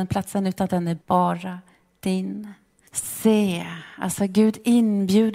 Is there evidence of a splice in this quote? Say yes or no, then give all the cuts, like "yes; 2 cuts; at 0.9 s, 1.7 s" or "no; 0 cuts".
yes; 2 cuts; at 1.0 s, 2.9 s